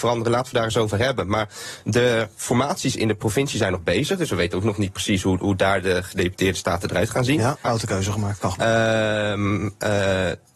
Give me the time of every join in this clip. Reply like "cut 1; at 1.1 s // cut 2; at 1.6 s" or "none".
cut 1; at 7.6 s